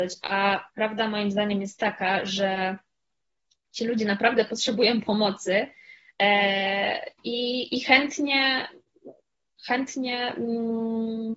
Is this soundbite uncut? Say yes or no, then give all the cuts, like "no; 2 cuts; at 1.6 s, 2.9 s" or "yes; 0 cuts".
yes; 0 cuts